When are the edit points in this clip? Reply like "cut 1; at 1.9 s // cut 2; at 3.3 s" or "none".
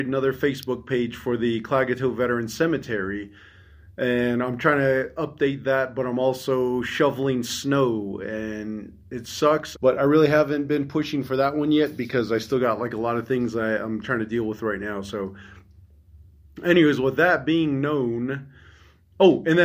cut 1; at 9.7 s